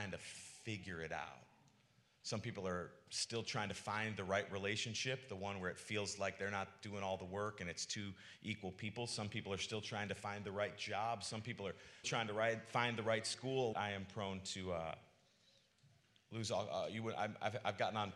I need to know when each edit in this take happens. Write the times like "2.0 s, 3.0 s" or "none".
12.0 s, 13.7 s